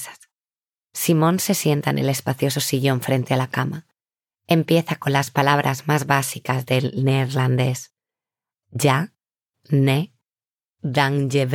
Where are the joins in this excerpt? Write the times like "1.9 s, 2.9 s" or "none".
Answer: none